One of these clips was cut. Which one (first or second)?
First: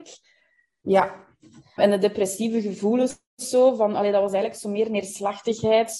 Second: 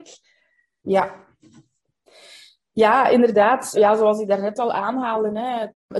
first